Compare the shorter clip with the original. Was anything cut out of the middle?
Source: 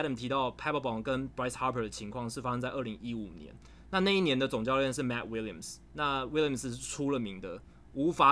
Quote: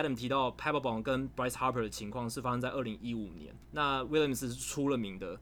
yes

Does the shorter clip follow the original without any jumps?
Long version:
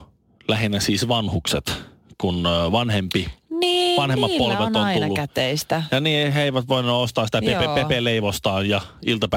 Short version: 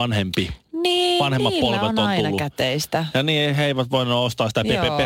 yes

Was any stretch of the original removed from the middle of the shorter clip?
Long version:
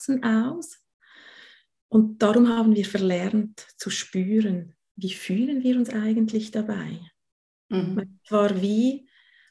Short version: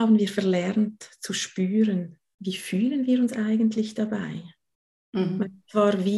no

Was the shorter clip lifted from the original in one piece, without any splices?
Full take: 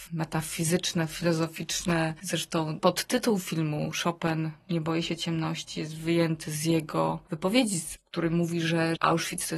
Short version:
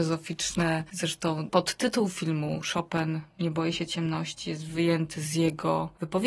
yes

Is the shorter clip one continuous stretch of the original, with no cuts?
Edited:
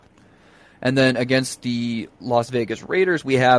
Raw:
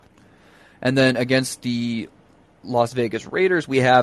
no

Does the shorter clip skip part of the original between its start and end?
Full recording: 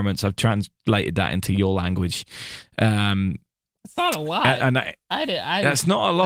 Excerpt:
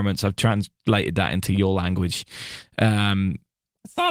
no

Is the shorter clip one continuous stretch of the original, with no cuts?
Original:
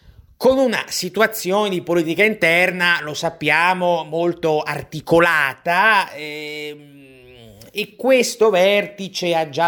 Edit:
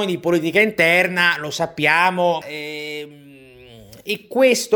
no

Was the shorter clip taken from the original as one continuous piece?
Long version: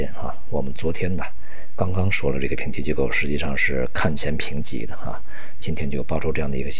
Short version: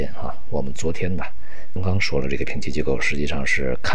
no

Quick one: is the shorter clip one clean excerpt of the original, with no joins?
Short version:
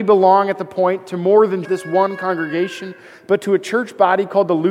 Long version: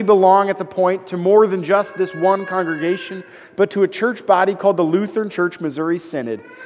no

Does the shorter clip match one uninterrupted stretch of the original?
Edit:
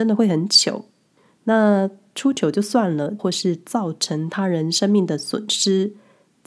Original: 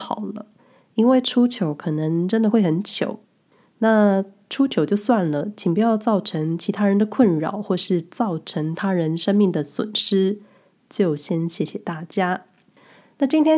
no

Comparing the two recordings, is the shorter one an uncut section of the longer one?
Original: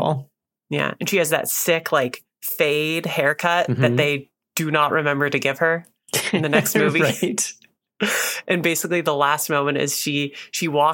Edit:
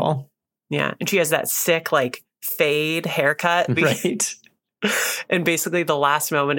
no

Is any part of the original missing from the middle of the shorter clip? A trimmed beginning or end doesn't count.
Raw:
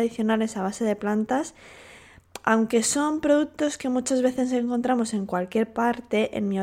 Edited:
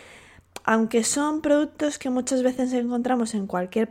no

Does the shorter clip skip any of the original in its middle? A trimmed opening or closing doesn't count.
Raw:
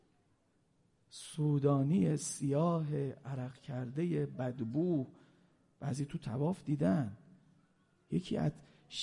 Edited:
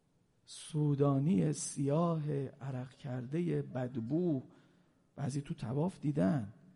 no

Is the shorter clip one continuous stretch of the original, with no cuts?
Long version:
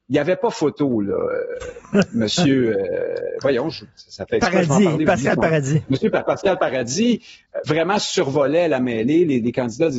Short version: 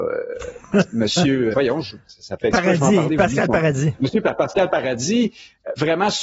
no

